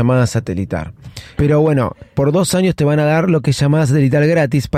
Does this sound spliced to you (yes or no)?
yes